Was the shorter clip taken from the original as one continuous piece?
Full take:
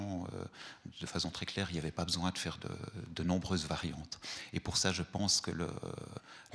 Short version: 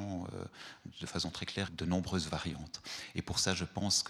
no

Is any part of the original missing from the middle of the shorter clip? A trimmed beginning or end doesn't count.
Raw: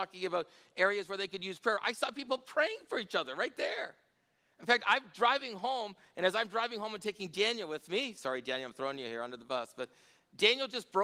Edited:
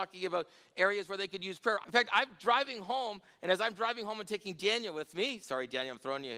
yes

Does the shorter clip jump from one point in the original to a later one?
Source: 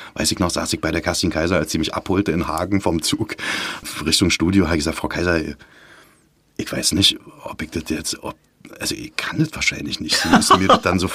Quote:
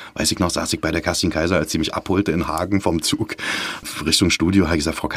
no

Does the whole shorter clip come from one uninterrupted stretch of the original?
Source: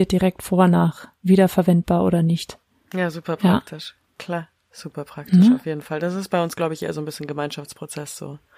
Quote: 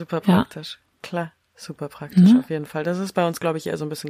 yes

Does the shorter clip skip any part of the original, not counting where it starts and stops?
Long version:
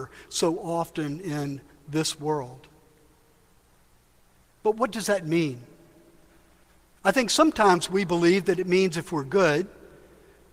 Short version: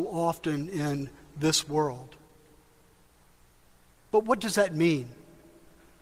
no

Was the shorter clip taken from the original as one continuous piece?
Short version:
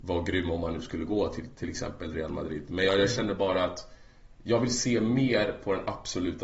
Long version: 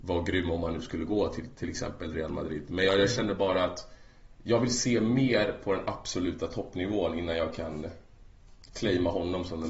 yes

